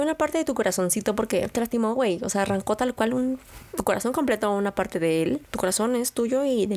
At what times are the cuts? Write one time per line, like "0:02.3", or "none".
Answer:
0:05.5